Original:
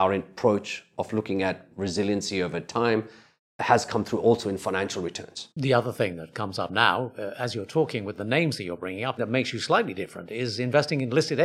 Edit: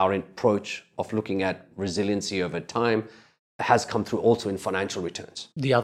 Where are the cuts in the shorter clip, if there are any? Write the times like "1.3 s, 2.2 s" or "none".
none